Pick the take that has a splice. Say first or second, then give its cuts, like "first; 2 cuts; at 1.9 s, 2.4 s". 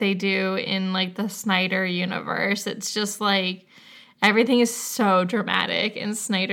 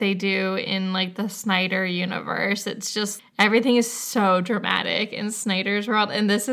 second; 1 cut; at 3.2 s